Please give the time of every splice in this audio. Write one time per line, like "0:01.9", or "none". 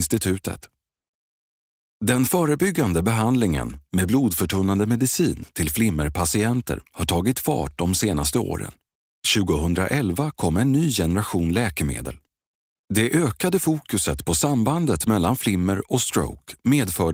none